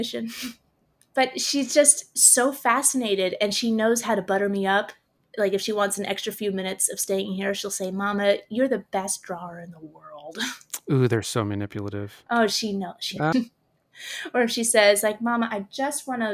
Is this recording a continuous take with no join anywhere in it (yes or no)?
no